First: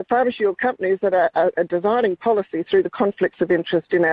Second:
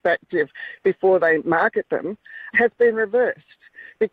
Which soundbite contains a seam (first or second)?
second